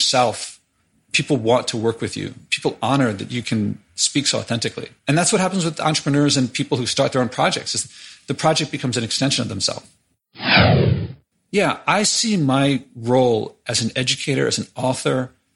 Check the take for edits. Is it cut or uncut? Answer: cut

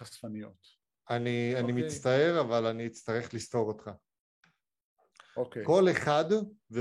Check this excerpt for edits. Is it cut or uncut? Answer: uncut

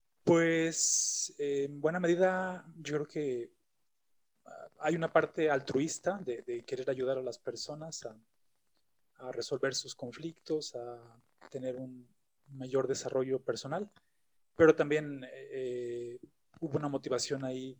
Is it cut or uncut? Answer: uncut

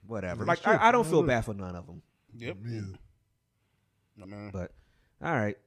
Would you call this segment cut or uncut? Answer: cut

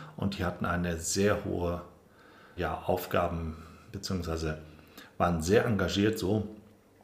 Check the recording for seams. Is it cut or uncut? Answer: cut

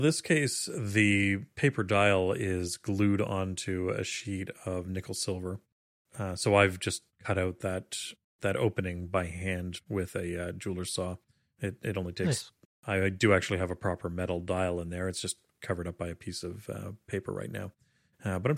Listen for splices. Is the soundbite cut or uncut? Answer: cut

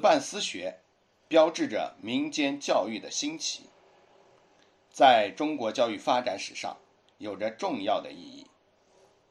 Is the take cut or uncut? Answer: uncut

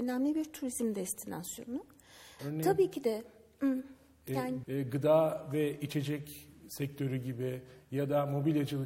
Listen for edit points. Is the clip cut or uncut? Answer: cut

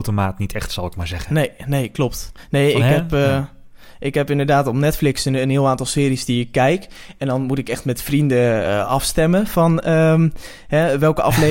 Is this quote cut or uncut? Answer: uncut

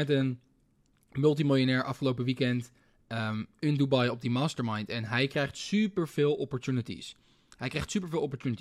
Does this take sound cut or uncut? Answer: uncut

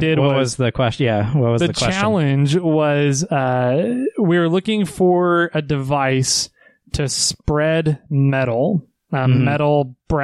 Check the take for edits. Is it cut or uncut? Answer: uncut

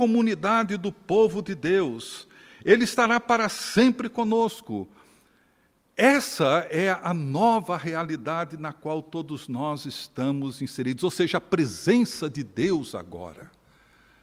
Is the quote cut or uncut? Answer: uncut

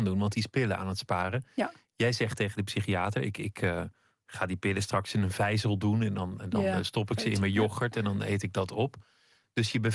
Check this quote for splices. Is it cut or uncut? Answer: uncut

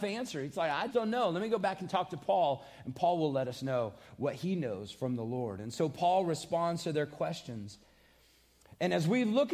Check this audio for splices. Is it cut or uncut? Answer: cut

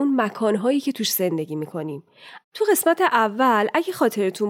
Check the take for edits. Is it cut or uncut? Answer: cut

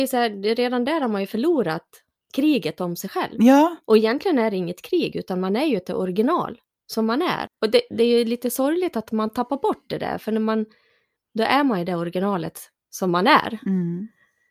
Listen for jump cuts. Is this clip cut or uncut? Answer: cut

